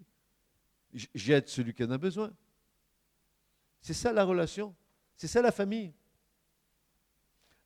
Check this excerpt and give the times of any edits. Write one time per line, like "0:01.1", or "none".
0:03.7